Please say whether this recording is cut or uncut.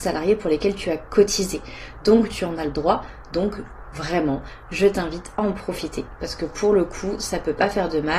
uncut